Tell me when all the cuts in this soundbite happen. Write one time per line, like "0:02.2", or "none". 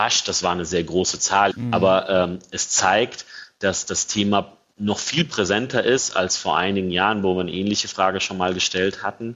0:01.5